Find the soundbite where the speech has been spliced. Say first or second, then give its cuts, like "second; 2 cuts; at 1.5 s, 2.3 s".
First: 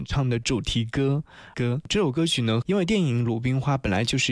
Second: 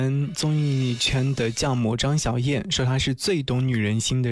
first; 2 cuts; at 1.5 s, 2.6 s